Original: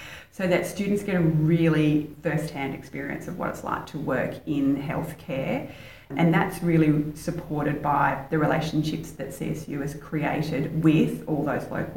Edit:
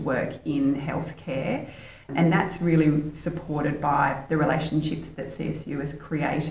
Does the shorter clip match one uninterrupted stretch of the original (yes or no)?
yes